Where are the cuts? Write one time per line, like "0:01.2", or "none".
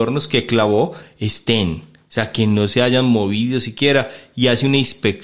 none

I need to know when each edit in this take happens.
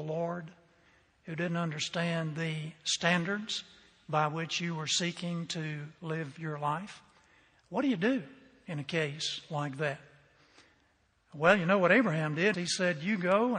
0:12.5

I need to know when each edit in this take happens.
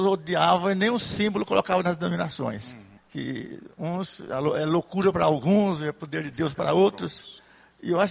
0:03.0

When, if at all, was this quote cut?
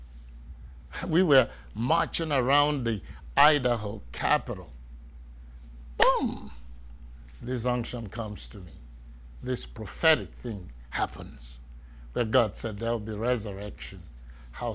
none

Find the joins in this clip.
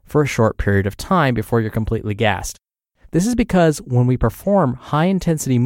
0:03.0

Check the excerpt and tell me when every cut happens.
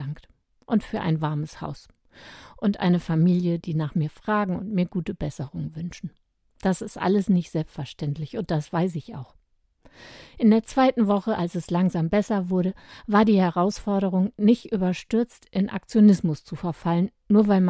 0:03.6

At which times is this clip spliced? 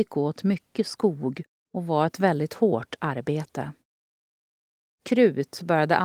none

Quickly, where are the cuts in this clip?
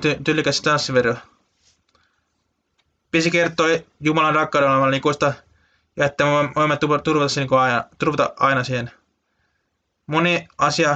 none

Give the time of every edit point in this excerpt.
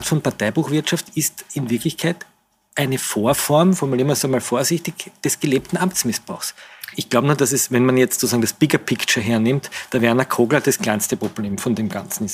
0:06.9

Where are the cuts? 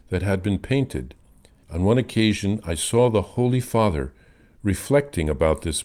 0:01.6

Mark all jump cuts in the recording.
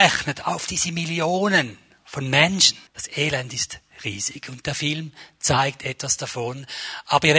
0:02.9

